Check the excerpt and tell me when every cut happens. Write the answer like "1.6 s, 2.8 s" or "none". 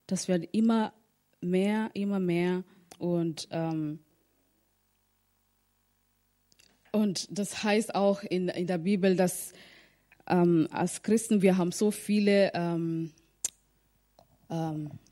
2.9 s

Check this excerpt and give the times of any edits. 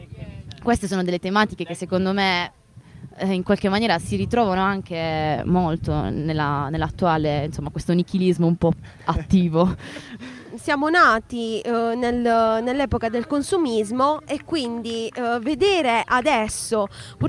none

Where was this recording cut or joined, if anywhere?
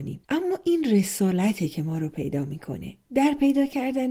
3.0 s

